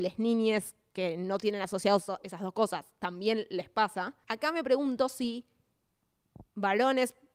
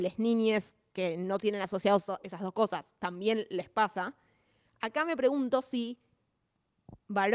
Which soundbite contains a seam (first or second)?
first